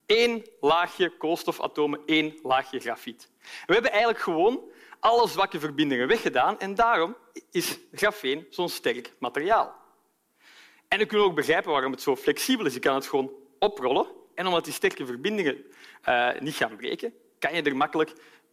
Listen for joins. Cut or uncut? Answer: uncut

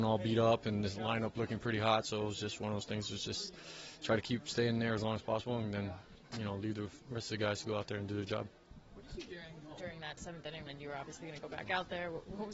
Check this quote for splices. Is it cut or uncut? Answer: cut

